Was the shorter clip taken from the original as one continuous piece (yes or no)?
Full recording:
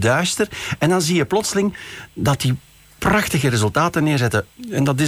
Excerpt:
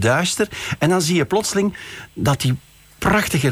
yes